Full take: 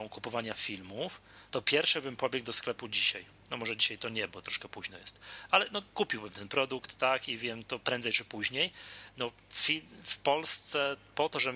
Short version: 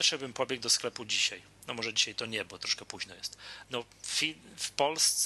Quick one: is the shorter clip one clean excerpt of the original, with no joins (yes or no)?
no